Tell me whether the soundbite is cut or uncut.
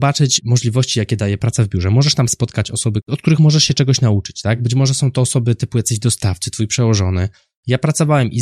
uncut